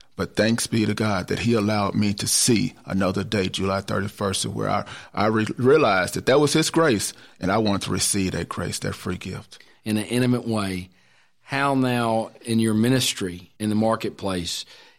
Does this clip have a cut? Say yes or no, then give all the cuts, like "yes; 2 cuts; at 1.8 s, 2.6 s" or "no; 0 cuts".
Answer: yes; 2 cuts; at 9.7 s, 13.6 s